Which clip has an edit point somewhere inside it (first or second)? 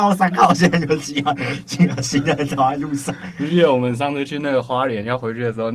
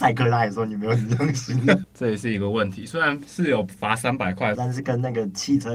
second